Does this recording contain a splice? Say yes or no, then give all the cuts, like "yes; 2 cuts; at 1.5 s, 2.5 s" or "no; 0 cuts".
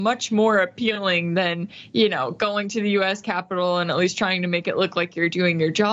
no; 0 cuts